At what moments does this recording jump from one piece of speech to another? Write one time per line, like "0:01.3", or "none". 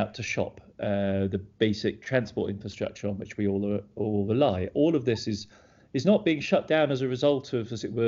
none